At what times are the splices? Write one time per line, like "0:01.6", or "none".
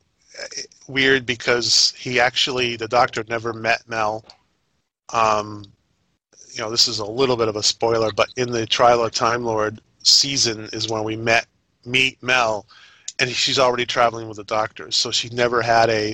none